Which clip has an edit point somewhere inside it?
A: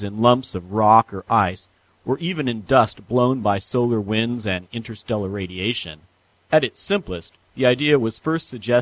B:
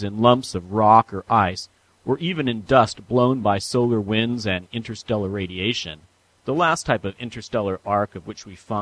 B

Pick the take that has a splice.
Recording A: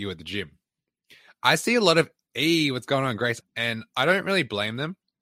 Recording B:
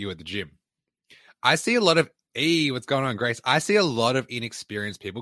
A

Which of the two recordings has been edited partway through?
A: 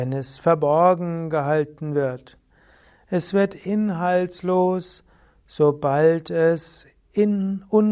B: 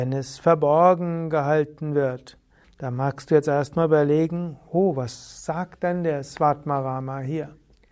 B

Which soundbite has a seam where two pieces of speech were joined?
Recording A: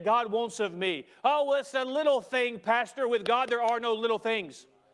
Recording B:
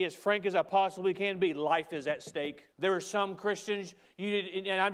B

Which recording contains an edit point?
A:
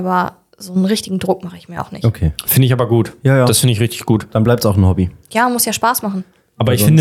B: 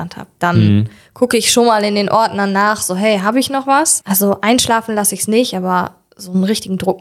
B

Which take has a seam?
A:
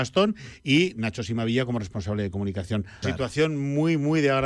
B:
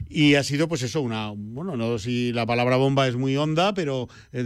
A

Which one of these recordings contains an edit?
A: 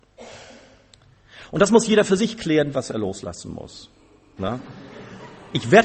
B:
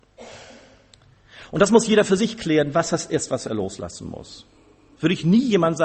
A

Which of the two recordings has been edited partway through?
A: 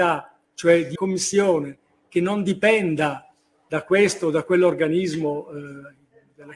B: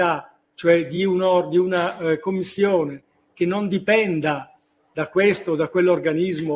A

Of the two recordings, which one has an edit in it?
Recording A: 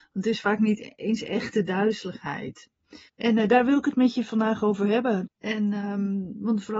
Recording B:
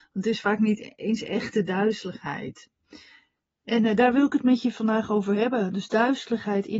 A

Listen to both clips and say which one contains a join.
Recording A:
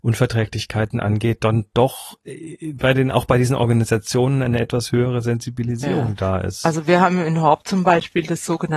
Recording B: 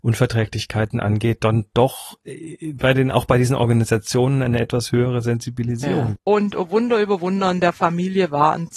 B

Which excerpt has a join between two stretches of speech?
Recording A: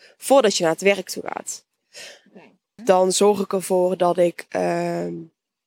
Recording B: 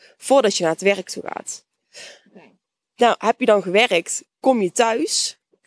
A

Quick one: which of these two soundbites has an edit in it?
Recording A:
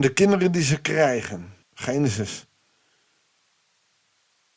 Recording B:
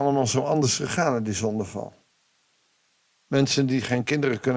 A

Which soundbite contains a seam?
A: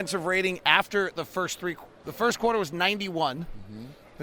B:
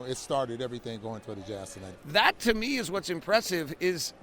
B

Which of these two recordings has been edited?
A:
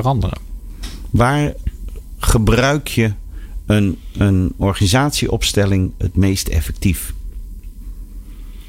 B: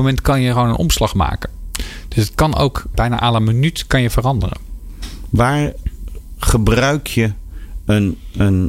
B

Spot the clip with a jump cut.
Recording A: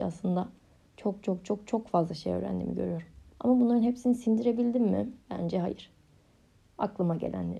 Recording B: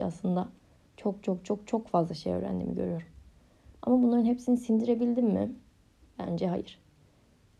A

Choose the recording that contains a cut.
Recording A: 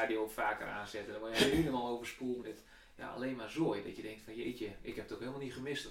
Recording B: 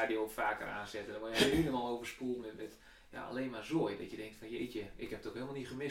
A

